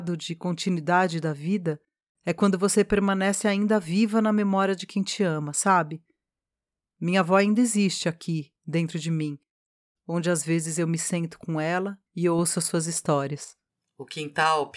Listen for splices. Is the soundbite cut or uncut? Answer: cut